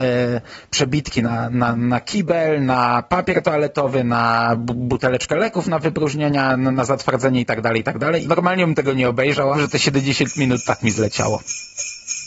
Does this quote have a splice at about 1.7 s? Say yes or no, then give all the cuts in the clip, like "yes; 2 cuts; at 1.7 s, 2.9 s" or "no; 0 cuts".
no; 2 cuts; at 8.2 s, 9.5 s